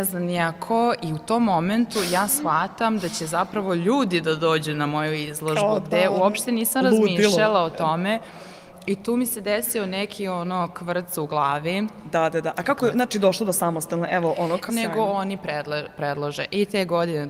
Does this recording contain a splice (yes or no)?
yes